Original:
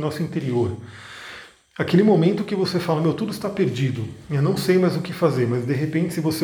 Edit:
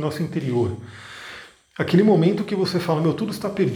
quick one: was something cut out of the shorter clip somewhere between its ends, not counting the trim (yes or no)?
no